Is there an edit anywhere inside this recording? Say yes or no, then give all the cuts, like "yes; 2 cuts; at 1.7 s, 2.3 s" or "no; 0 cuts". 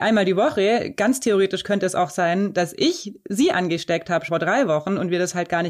yes; 1 cut; at 4.3 s